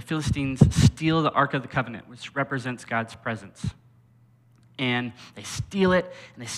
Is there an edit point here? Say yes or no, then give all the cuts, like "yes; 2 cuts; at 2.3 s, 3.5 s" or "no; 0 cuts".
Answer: no; 0 cuts